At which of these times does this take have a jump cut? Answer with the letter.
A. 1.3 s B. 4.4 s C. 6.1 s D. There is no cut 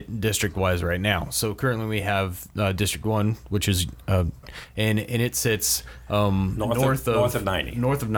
B